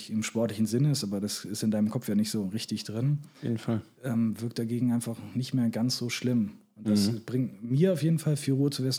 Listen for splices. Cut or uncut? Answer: uncut